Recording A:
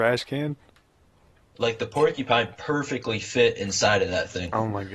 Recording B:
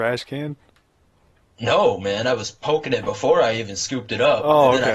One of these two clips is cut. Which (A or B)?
A